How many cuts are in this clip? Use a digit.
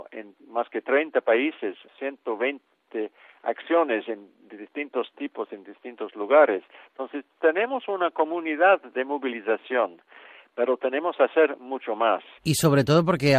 0